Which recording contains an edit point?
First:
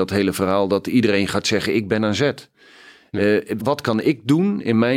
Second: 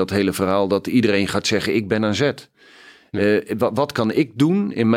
first; 1 cut; at 3.6 s

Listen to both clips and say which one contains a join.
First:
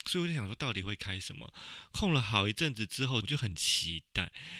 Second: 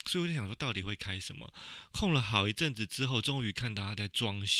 first; 1 cut; at 3.2 s

